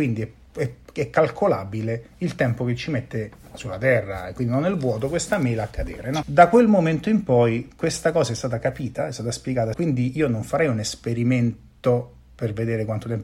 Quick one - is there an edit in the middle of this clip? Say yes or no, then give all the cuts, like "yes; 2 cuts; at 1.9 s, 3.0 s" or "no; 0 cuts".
yes; 2 cuts; at 6.2 s, 9.7 s